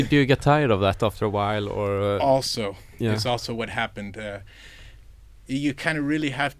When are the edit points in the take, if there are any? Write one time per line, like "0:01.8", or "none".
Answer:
none